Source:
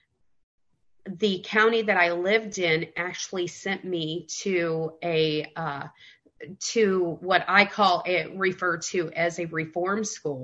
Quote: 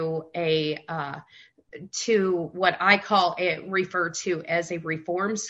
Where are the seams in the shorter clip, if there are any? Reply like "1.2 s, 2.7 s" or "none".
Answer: none